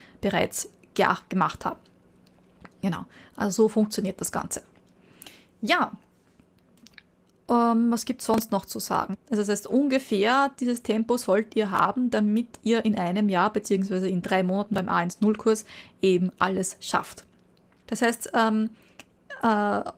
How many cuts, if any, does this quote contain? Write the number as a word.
two